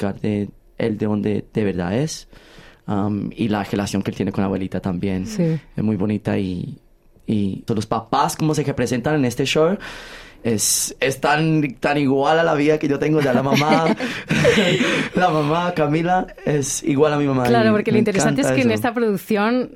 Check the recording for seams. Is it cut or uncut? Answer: cut